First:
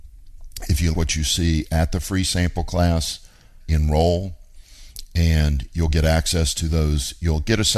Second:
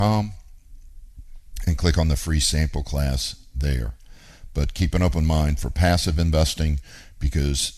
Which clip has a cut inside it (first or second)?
first